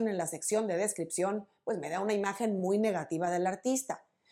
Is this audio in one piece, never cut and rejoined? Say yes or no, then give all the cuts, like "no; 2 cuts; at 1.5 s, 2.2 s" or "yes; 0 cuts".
yes; 0 cuts